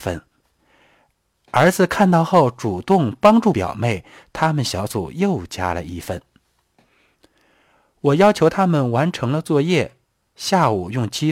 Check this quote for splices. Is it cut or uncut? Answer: uncut